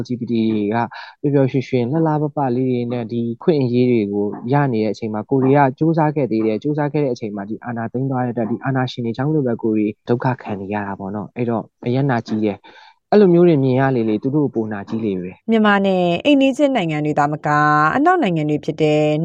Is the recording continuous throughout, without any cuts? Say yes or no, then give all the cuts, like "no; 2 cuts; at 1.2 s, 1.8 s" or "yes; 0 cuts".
no; 1 cut; at 15.4 s